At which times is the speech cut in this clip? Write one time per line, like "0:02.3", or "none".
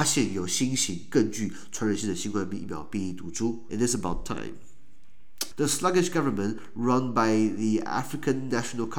0:03.7
0:05.5